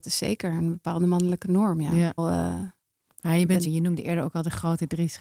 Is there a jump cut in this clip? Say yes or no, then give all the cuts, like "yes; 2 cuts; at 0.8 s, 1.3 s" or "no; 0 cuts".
yes; 2 cuts; at 2.2 s, 3.6 s